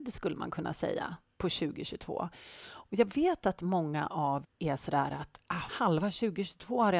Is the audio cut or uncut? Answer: cut